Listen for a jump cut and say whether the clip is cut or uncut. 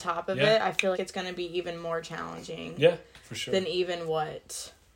cut